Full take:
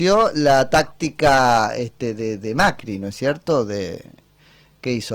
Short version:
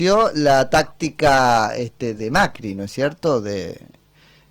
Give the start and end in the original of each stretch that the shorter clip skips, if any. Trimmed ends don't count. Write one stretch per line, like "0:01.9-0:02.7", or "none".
0:02.2-0:02.4